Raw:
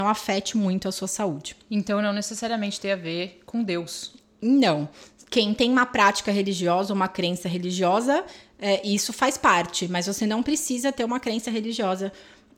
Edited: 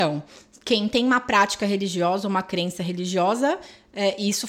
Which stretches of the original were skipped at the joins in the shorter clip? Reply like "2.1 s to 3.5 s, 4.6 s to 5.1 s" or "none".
none